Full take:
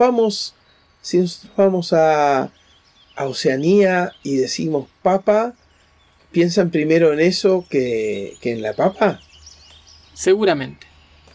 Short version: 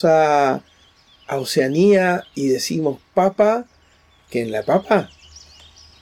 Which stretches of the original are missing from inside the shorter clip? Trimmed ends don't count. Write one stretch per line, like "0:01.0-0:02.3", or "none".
0:06.2-0:08.4